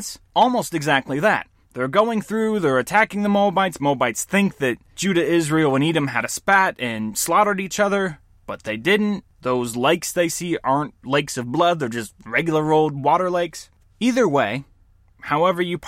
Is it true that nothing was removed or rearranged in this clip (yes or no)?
no